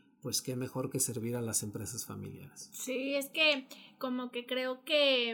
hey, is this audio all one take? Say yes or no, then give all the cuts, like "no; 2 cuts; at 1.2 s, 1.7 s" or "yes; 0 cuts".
yes; 0 cuts